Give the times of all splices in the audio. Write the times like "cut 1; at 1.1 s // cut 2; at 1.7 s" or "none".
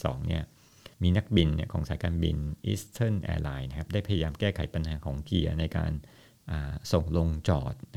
cut 1; at 0.9 s